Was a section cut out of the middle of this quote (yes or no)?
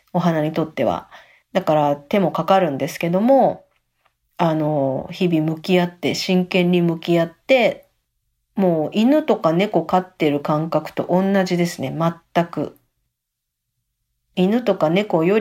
no